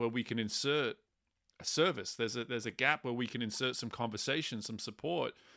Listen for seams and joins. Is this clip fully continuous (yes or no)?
yes